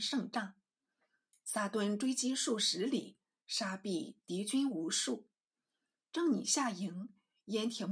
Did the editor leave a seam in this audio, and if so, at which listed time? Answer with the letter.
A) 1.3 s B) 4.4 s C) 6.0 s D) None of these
A